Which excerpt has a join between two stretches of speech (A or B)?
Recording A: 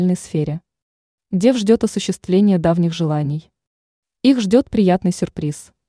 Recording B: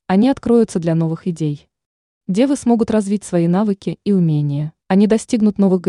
B